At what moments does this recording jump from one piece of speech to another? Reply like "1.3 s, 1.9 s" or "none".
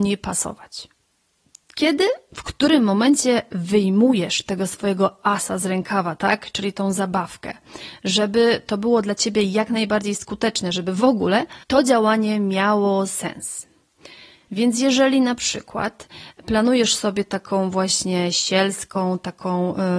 11.6 s, 14.5 s